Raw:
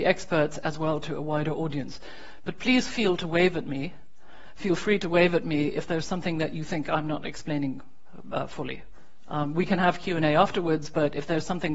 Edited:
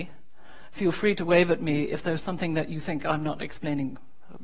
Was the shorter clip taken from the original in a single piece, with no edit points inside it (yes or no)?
yes